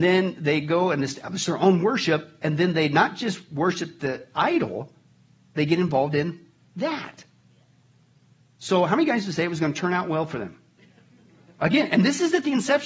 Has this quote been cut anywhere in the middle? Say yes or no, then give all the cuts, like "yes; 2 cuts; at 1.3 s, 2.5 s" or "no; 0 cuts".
no; 0 cuts